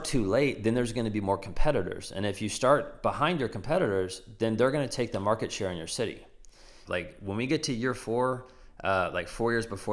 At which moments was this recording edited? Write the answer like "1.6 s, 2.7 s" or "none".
6.8 s

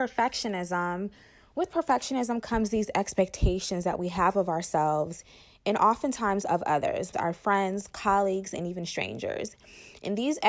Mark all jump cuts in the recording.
7.1 s

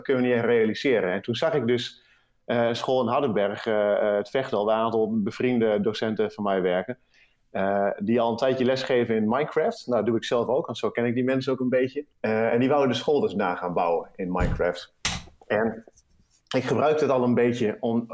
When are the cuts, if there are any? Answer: 12.1 s

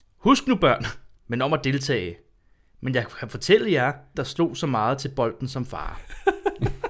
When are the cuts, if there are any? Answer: 1.2 s, 4.1 s

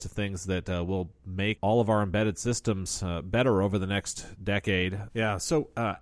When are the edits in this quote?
5.1 s

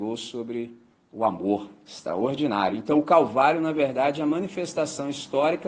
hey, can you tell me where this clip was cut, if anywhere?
none

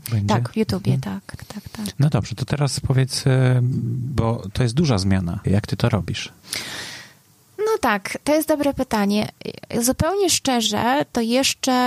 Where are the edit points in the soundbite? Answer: 1.4 s, 5.4 s

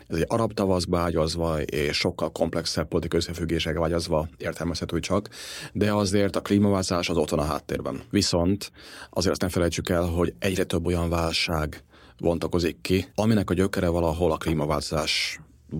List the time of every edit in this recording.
8.1 s, 13.1 s

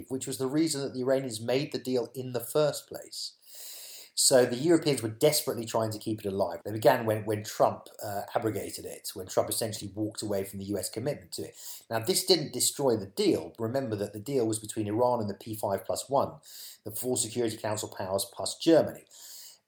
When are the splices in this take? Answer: 6.6 s

